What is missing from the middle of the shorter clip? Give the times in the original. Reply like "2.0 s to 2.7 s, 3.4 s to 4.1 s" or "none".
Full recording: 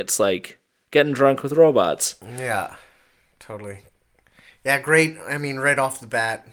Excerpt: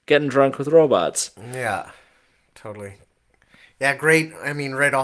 none